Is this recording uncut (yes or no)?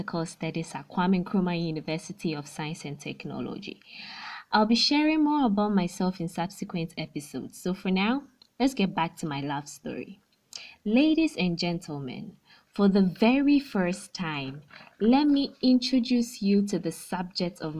yes